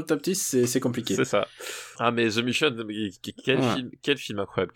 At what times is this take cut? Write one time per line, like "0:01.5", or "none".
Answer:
0:01.9